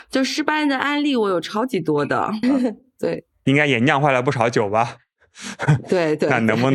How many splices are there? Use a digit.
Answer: 1